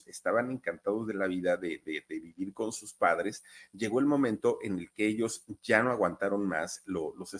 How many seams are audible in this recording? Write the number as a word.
zero